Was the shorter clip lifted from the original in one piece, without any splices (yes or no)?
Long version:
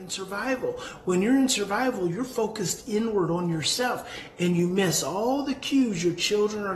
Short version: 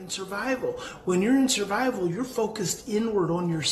yes